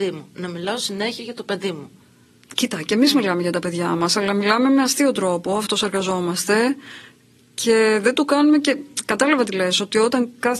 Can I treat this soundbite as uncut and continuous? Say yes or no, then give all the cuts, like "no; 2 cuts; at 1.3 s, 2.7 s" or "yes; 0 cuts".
yes; 0 cuts